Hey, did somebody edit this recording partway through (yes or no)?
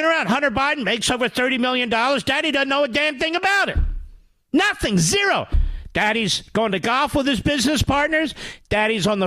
no